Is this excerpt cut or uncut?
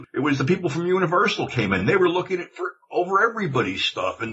uncut